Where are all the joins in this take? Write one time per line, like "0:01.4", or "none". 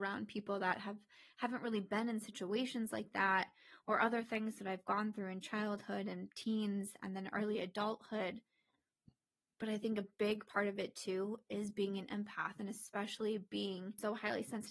none